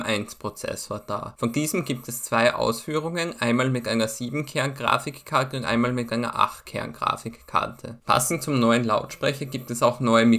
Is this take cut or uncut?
cut